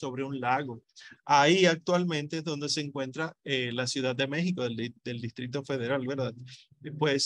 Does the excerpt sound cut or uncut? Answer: cut